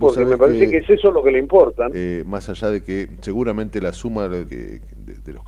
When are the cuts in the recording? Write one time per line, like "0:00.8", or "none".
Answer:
0:01.9
0:04.5